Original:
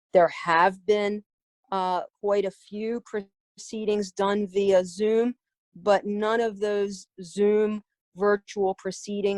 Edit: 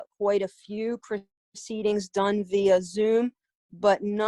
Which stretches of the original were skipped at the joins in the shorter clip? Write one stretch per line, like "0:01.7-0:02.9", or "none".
none